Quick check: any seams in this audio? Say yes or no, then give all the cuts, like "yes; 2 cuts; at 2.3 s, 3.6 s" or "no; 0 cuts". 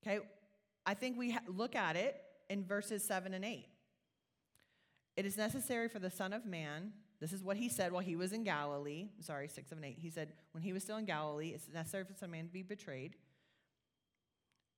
no; 0 cuts